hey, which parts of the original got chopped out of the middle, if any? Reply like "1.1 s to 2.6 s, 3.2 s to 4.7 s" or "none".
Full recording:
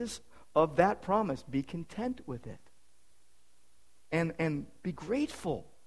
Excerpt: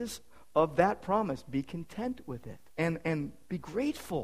2.7 s to 4.0 s